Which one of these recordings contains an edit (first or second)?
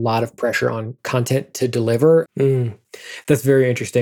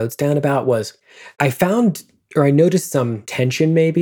first